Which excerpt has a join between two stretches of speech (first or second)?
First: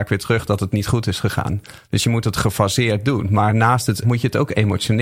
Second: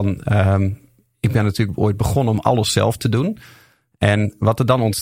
first